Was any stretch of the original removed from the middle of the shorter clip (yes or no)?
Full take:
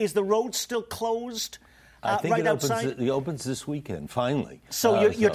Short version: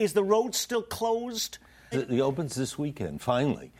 yes